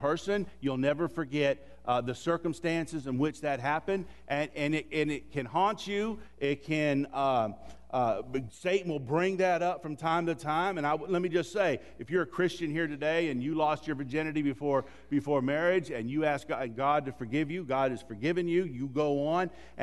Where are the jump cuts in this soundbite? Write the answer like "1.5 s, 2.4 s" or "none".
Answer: 4.3 s